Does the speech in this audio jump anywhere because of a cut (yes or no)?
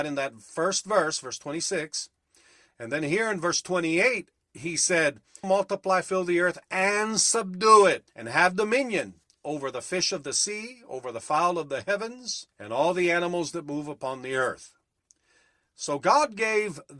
yes